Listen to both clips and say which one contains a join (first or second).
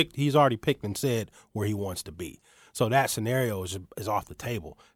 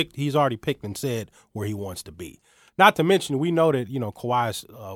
second